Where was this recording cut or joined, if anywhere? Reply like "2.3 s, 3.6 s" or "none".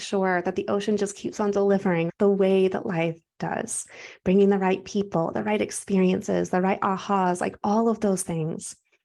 none